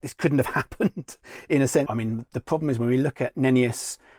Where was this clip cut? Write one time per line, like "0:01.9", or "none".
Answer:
0:01.9